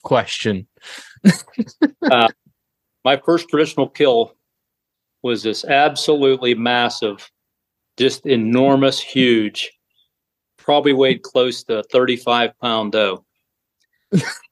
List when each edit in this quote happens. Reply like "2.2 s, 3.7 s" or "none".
none

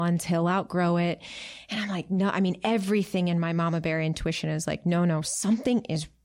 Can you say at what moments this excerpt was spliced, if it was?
none

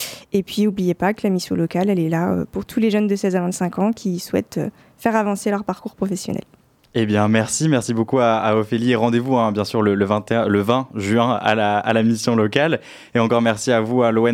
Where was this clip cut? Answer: none

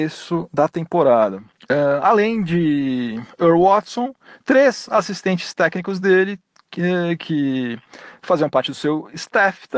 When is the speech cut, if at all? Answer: none

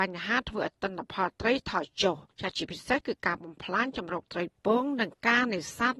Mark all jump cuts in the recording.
2.3 s

